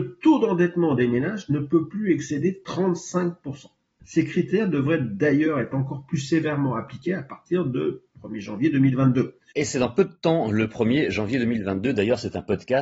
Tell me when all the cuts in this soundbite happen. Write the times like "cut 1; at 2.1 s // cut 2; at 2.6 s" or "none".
cut 1; at 9.5 s